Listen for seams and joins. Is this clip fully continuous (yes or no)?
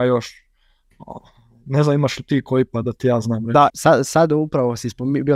no